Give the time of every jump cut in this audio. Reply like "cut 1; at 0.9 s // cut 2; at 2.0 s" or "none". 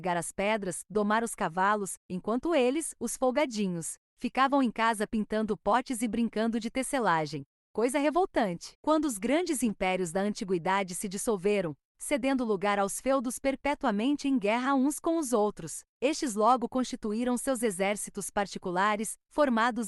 cut 1; at 2.0 s